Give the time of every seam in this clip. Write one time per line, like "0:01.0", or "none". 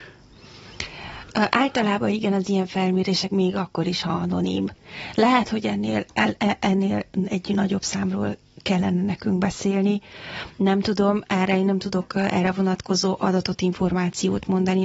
0:03.3